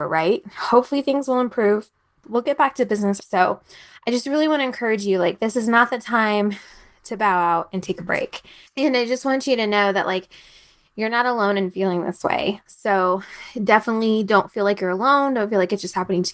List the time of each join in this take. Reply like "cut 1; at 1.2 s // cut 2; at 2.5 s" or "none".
cut 1; at 3.2 s // cut 2; at 12.7 s